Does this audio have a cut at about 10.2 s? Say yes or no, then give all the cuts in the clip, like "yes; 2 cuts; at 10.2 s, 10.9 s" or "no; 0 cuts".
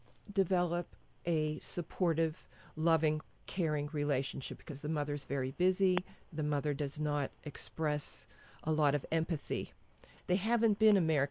yes; 1 cut; at 10.2 s